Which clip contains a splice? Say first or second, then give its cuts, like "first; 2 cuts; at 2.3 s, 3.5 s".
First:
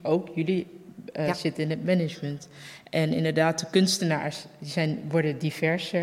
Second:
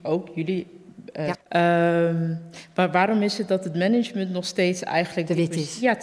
second; 1 cut; at 1.3 s